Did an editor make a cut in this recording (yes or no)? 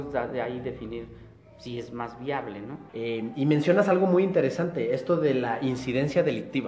yes